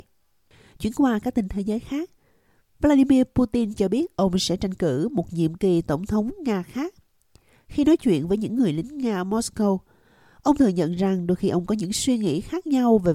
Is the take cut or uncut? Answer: uncut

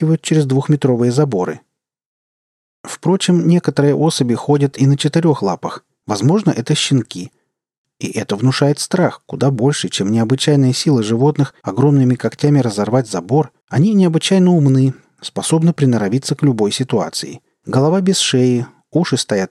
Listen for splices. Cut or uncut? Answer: cut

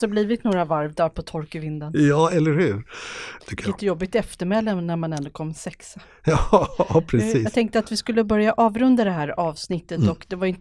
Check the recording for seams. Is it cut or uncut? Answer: cut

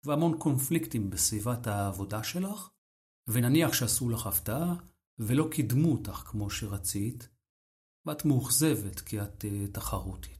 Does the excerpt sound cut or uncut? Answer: uncut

